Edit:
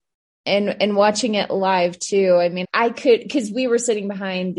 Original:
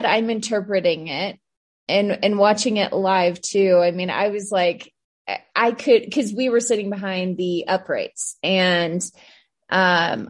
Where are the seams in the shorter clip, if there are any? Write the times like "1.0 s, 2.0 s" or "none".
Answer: 2.6 s